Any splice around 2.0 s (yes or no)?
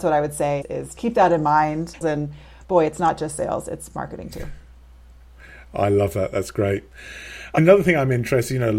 yes